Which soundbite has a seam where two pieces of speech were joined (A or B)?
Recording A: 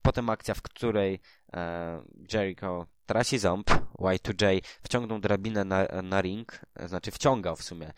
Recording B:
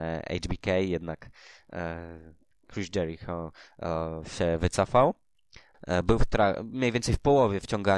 B